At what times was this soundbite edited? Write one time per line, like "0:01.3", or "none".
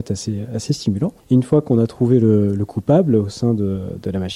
0:01.2

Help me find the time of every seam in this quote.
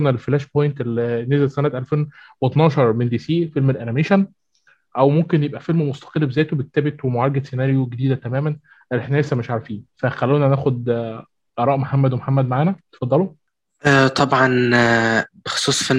0:09.9

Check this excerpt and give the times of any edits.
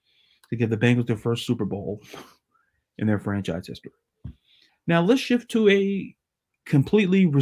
0:04.7

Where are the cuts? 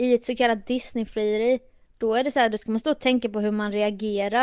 none

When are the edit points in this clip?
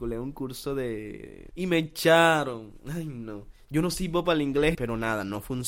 0:01.5
0:04.7

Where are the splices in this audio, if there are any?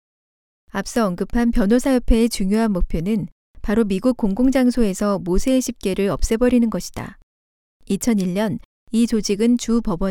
0:07.7

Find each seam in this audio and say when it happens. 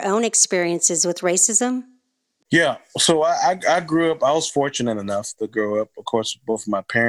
none

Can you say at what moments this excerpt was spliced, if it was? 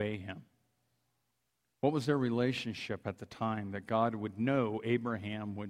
0:01.8

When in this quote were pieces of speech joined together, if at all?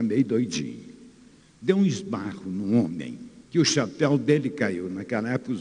0:01.4
0:03.4

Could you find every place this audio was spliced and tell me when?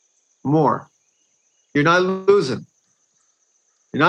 none

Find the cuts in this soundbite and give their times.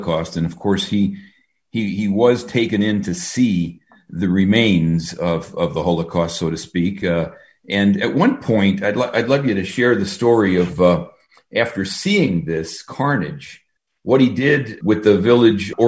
none

